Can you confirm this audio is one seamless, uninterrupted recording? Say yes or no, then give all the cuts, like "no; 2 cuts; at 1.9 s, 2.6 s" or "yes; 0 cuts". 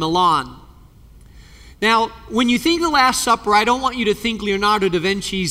yes; 0 cuts